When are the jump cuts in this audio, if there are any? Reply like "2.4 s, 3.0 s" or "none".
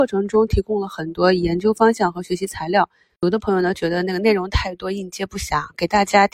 none